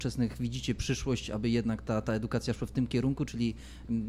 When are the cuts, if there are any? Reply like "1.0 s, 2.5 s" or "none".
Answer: none